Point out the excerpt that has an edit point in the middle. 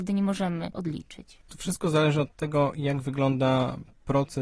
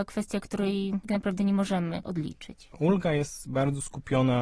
second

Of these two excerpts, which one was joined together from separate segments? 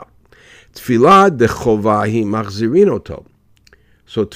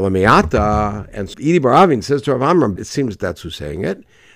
second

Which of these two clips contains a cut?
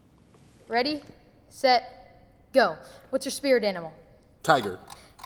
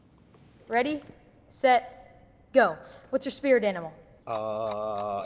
second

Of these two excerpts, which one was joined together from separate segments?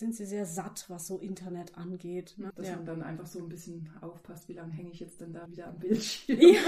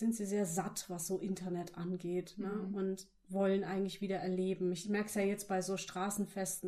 first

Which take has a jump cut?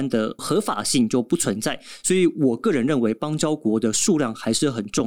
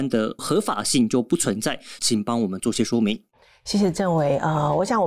second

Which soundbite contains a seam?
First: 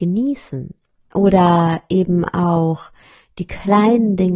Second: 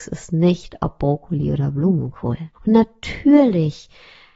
second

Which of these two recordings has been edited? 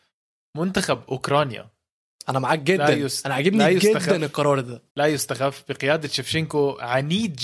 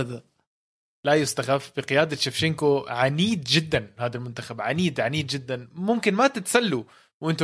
first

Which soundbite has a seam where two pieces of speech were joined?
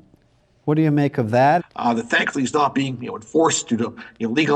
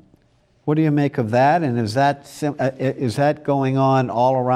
first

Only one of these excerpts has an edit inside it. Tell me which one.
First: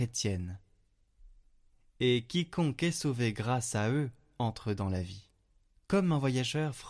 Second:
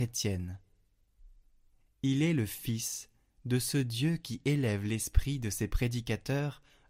second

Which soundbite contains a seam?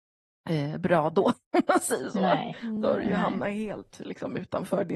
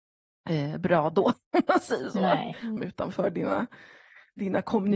second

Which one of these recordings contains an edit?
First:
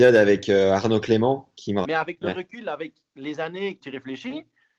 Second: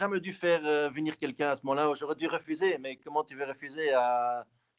first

